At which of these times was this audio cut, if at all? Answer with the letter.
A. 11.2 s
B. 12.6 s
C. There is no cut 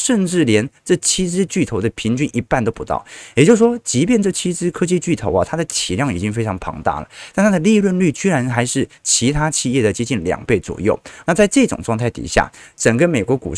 A